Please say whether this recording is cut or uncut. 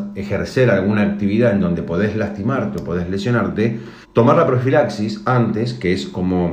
cut